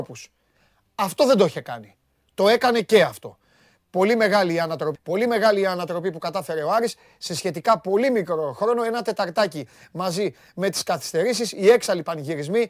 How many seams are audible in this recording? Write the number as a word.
one